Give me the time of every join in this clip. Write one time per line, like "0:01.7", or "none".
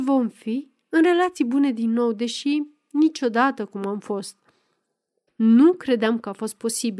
0:05.3